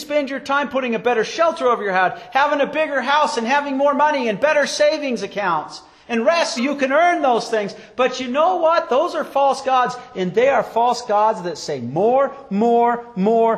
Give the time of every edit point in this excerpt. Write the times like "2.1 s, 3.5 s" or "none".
6.6 s